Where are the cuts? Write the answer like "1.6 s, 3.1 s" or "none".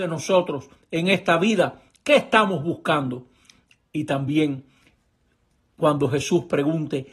none